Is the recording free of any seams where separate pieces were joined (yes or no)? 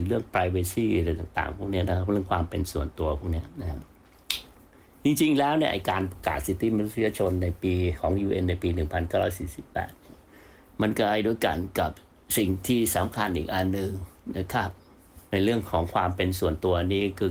no